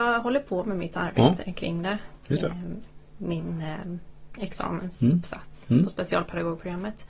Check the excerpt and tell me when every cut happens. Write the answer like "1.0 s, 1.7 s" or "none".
none

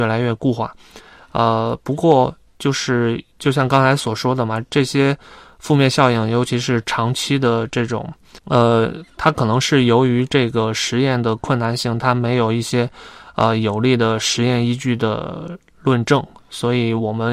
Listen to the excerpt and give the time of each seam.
none

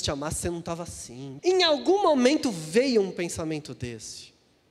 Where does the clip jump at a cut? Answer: 1.4 s

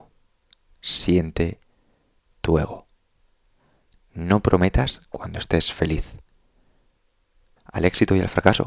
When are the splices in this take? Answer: 7.6 s

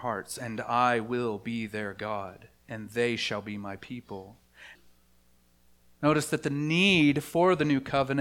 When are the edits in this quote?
4.8 s

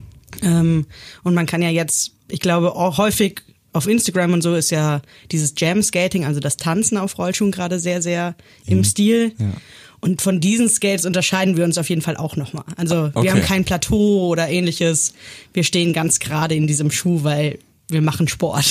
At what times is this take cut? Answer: none

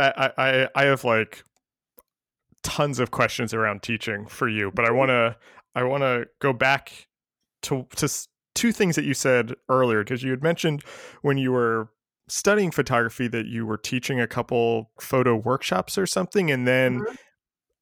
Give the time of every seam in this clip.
10.1 s, 15.0 s

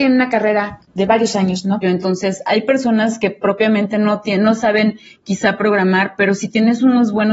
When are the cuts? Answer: 1.8 s

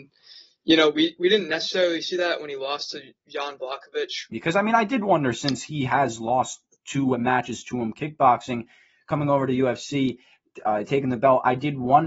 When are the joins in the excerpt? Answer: 4.3 s

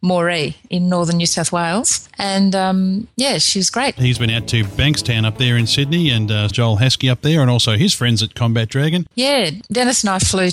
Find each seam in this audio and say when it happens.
4.0 s, 6.5 s, 9.1 s

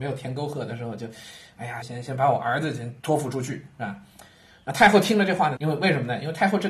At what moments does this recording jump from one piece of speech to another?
1.8 s, 3.0 s, 5.6 s

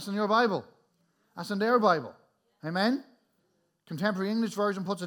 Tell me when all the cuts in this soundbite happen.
none

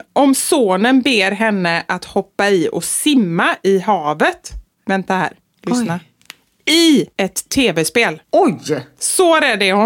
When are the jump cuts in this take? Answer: 8.2 s

